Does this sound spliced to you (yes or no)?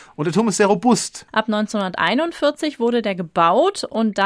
yes